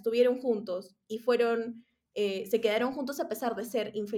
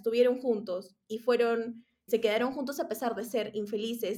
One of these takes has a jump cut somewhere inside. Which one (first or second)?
second